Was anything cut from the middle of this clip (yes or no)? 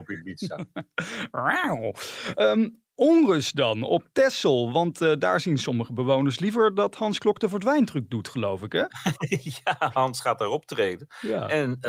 no